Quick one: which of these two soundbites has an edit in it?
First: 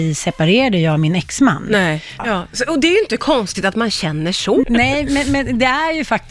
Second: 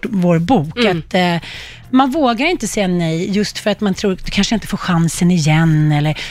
first; 2 cuts; at 2.2 s, 4.6 s

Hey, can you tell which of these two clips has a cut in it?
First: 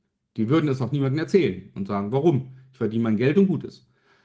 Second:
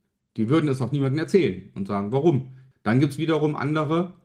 second; 1 cut; at 2.7 s

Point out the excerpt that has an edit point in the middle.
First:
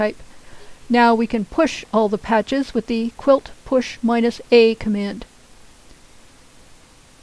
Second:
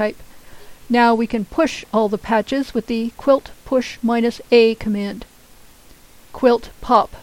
second; 1 cut; at 6.3 s

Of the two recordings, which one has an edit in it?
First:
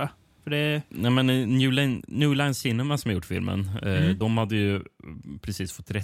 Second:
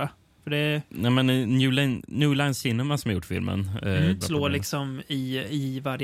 second; 1 cut; at 4.2 s

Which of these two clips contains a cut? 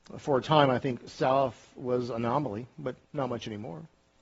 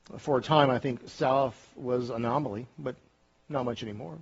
first; 1 cut; at 3.0 s

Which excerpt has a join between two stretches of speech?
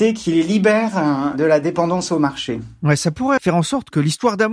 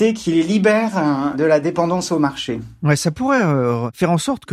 first; 1 cut; at 3.4 s

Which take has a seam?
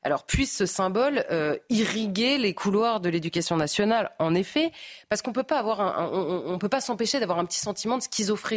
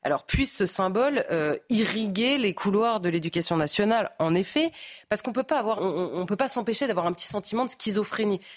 second; 1 cut; at 5.8 s

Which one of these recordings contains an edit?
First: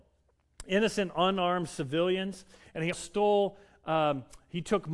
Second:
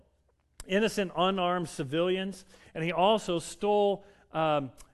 first; 1 cut; at 2.9 s

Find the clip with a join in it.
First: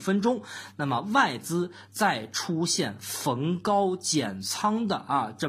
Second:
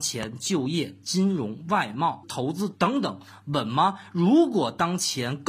second; 1 cut; at 2.2 s

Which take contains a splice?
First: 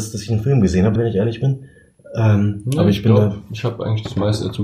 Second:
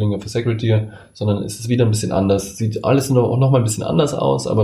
first; 1 cut; at 1.0 s

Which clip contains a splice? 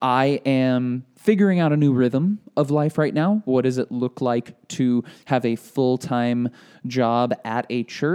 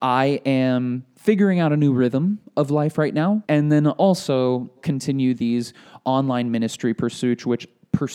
second; 2 cuts; at 3.4 s, 4.8 s

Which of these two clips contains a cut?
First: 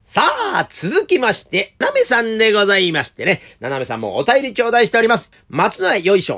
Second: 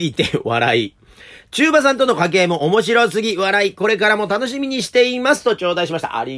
first; 2 cuts; at 1.8 s, 5.3 s

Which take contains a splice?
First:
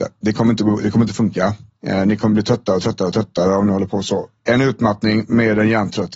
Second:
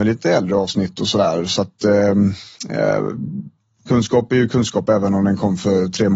first; 1 cut; at 4.4 s

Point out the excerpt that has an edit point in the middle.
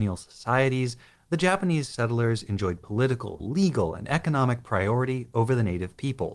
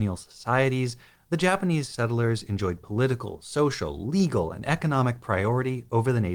first; 1 cut; at 3.4 s

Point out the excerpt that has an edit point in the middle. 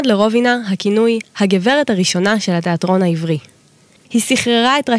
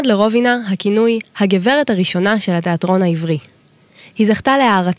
first; 1 cut; at 4.0 s

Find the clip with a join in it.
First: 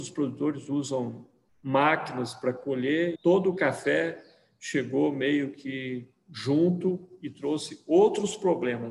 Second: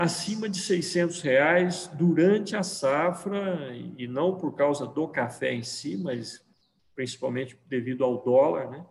first; 1 cut; at 3.2 s

